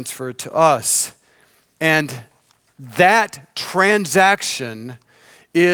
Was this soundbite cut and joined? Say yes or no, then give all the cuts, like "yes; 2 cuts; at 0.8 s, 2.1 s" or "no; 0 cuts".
no; 0 cuts